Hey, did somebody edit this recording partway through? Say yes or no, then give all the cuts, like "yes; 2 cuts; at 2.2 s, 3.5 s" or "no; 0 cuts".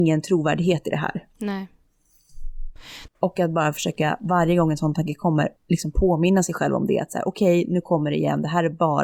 yes; 2 cuts; at 3.1 s, 5.6 s